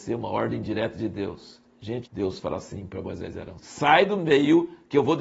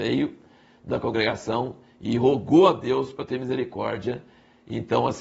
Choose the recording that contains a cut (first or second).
first